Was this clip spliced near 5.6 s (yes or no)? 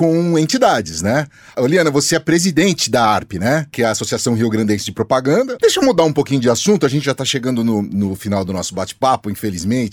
yes